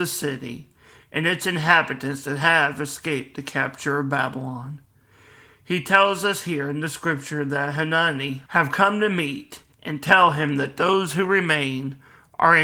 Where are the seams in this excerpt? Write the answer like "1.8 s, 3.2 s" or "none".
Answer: 8.5 s, 9.7 s